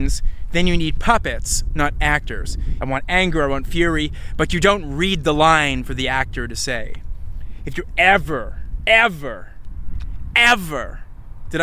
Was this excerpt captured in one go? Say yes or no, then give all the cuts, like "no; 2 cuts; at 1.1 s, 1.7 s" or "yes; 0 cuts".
no; 1 cut; at 2.8 s